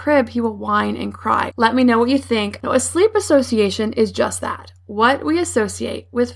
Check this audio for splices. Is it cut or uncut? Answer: cut